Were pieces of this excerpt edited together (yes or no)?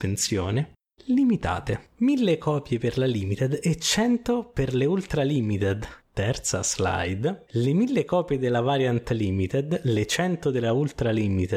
yes